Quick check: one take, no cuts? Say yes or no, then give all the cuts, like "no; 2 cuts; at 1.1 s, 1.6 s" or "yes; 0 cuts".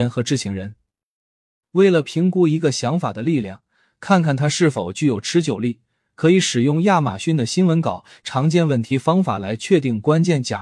yes; 0 cuts